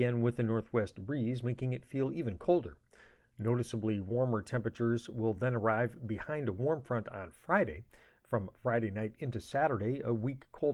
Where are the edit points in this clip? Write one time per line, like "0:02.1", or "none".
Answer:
none